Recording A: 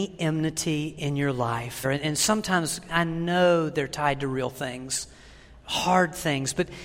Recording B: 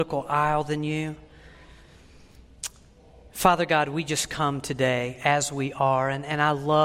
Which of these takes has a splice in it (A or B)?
A